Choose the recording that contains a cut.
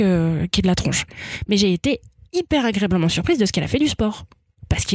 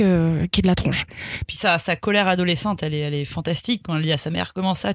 second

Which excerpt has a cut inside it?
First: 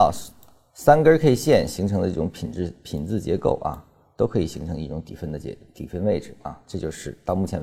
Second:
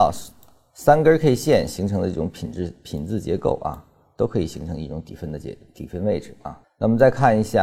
second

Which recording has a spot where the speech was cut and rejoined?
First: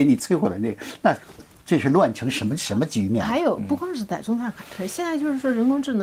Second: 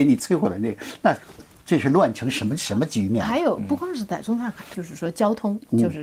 second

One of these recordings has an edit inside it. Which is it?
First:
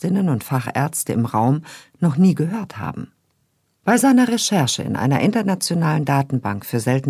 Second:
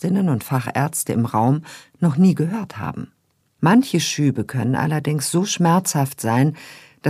second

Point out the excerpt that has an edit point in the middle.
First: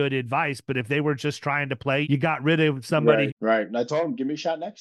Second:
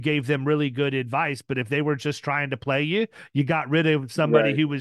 first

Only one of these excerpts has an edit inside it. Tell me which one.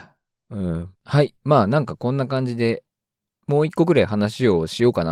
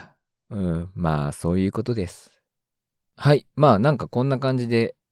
first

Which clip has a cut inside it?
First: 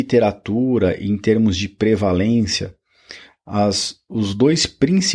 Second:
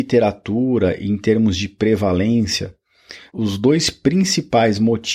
second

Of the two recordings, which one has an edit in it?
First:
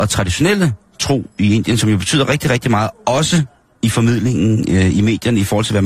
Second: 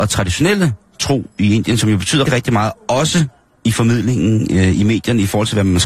second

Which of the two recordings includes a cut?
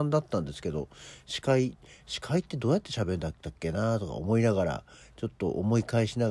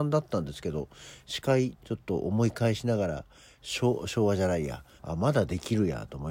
second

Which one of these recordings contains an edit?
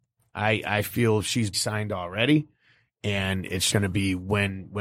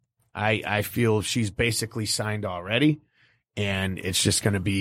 first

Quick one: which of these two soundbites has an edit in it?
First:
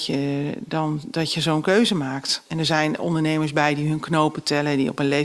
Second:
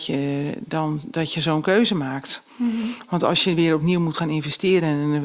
first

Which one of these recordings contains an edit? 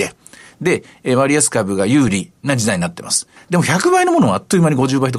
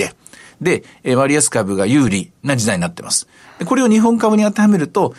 first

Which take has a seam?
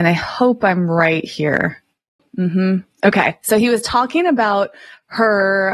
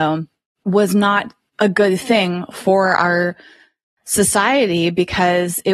first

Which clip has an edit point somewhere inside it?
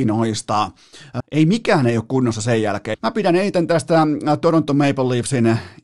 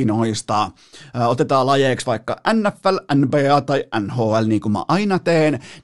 first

